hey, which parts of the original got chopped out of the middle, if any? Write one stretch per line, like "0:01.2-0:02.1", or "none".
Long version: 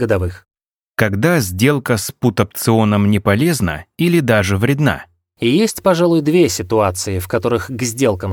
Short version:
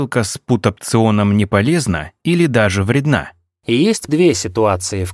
0:05.8-0:06.2